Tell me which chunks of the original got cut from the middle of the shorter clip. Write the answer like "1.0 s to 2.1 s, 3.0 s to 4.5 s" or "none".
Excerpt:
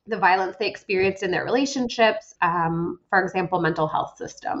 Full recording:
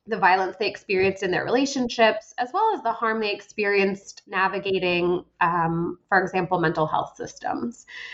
2.4 s to 5.3 s